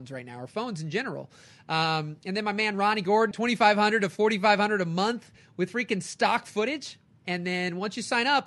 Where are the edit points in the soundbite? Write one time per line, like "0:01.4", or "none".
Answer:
0:03.3
0:07.2